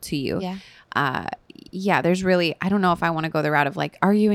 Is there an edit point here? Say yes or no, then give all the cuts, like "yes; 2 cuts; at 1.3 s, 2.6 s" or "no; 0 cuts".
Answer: no; 0 cuts